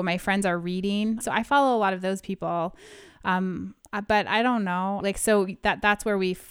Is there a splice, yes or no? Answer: yes